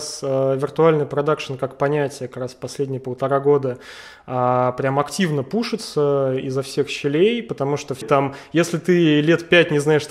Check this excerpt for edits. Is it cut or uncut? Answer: cut